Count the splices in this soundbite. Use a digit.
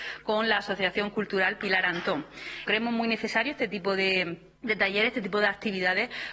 2